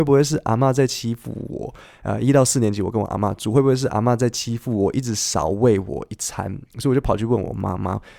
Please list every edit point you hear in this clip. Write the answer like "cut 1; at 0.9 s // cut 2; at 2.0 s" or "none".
none